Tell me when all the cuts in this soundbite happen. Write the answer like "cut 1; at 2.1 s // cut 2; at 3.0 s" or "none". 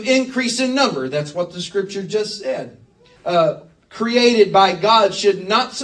cut 1; at 3.2 s